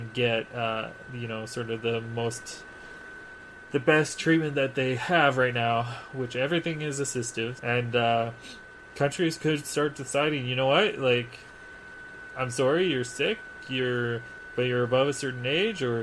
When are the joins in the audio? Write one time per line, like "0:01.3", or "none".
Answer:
0:07.6